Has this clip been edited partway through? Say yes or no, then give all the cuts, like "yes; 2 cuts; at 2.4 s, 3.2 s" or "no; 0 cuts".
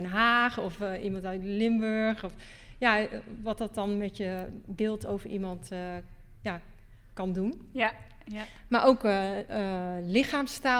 no; 0 cuts